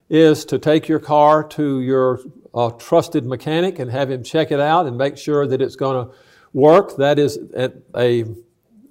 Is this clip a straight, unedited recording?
no; 1 cut; at 7.9 s

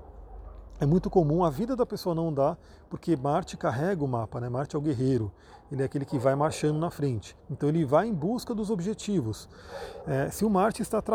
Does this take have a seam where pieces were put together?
yes; 2 cuts; at 7.4 s, 10.0 s

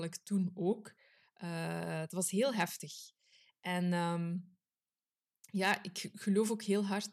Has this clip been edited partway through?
no; 0 cuts

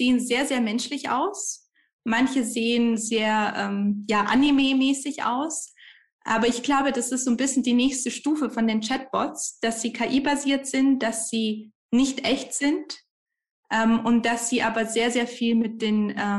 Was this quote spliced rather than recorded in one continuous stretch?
no; 0 cuts

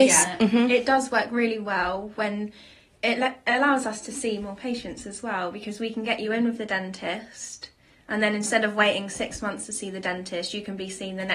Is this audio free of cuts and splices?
yes; 0 cuts

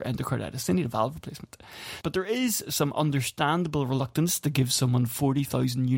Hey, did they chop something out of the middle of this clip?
yes; 1 cut; at 2.0 s

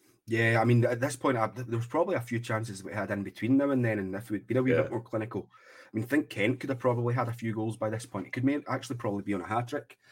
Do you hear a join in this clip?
no; 0 cuts

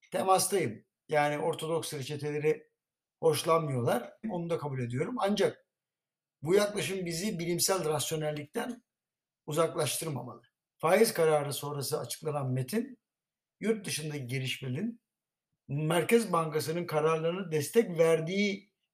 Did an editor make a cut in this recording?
yes; 2 cuts; at 4.2 s, 10.7 s

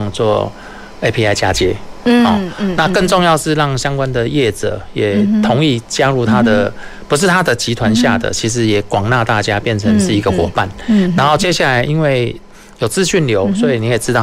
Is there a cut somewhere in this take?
no; 0 cuts

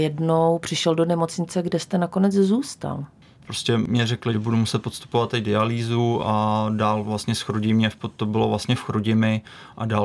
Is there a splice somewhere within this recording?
no; 0 cuts

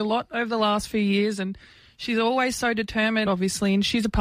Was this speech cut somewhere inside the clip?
yes; 1 cut; at 3.3 s

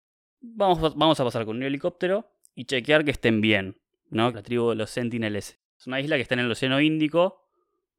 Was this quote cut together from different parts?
yes; 2 cuts; at 4.3 s, 5.7 s

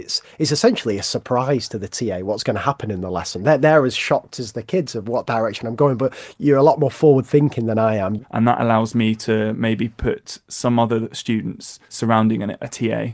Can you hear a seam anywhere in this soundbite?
yes; 1 cut; at 8.2 s

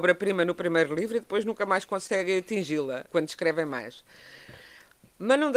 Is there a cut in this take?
yes; 1 cut; at 3.0 s

